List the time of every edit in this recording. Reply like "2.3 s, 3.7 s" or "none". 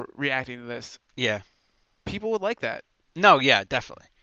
none

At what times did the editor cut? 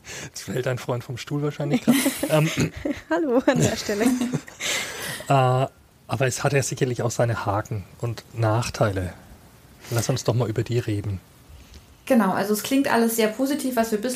none

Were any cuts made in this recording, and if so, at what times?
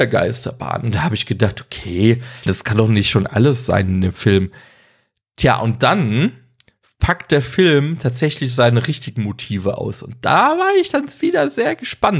2.5 s

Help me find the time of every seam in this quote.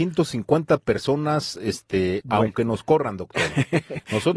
2.2 s

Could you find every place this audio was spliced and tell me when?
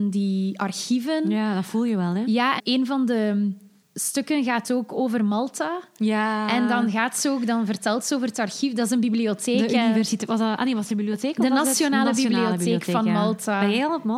2.6 s

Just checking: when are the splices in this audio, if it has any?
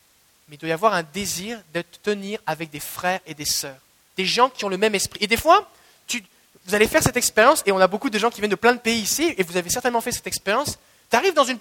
4.1 s

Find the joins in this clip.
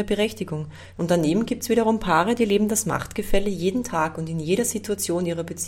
1.0 s

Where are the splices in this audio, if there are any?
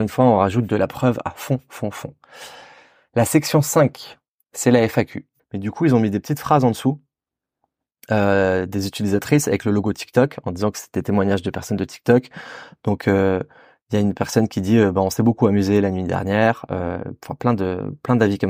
5.4 s

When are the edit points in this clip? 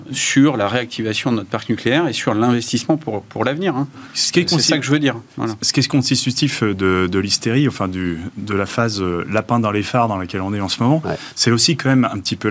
none

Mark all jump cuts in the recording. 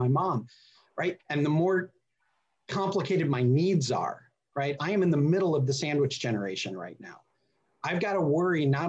1.2 s, 4.8 s

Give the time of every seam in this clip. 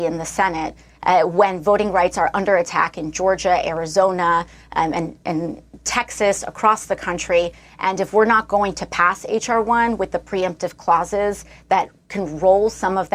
none

